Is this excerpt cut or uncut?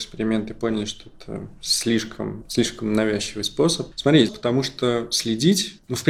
cut